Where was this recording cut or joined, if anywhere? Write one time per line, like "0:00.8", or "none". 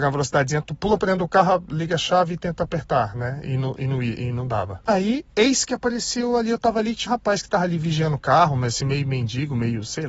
0:07.1